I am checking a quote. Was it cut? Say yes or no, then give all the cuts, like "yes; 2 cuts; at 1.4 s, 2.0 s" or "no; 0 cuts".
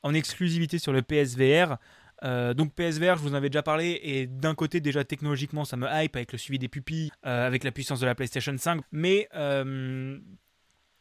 yes; 2 cuts; at 7.1 s, 8.8 s